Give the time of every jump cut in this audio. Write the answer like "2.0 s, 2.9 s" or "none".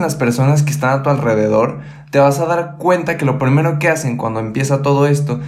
none